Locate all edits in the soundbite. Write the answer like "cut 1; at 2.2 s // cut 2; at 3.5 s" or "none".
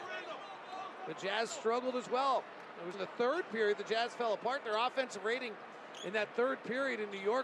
cut 1; at 2.9 s